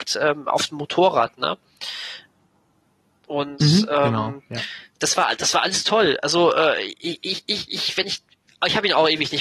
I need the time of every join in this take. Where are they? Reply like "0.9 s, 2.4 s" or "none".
none